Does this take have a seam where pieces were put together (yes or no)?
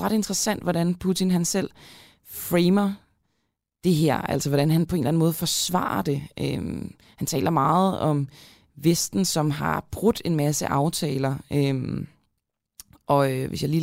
no